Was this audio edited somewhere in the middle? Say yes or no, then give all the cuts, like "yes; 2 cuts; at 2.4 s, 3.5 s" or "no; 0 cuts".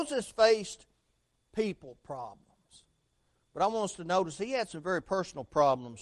no; 0 cuts